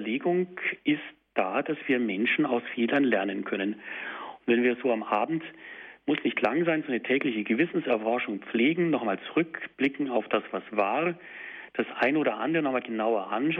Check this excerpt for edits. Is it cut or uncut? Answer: uncut